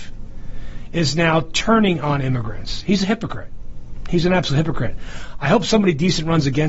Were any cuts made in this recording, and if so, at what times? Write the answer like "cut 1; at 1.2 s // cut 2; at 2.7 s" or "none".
none